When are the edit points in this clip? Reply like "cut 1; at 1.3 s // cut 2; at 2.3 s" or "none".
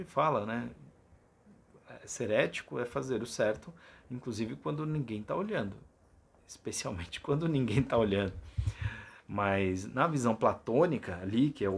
none